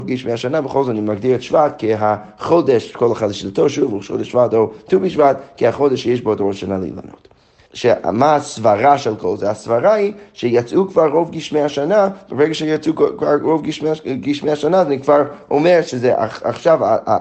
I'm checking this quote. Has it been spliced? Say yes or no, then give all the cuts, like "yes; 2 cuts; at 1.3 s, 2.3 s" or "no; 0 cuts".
yes; 1 cut; at 7.7 s